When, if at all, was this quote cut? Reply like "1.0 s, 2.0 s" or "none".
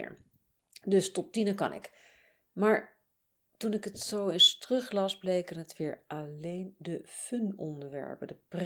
none